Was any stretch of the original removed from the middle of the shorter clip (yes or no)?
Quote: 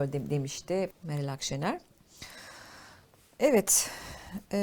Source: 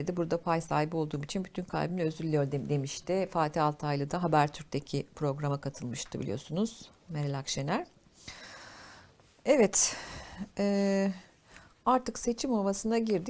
yes